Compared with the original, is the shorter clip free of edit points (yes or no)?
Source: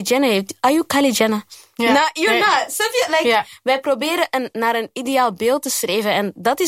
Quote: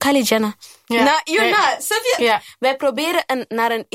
no